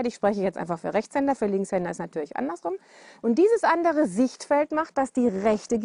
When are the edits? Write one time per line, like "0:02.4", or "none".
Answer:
0:03.2